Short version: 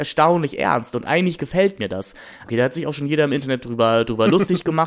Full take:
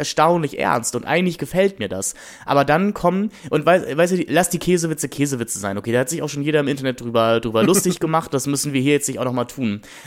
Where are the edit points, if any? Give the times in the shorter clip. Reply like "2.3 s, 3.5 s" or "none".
2.4 s

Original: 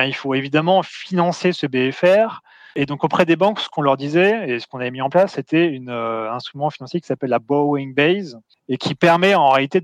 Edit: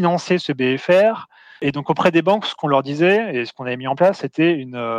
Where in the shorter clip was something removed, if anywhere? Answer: none

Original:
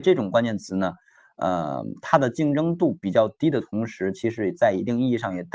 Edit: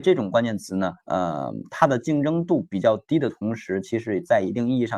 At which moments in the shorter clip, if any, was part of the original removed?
1.0 s

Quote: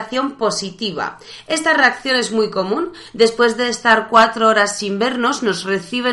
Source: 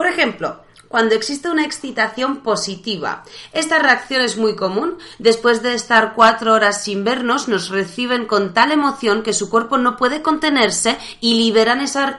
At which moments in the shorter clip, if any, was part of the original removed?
none

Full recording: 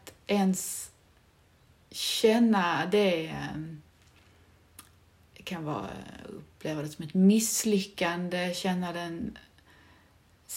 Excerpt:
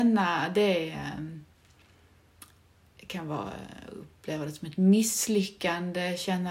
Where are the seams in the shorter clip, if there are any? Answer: none

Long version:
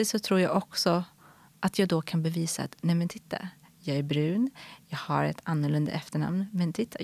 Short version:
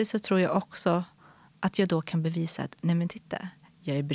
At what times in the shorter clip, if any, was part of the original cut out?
none

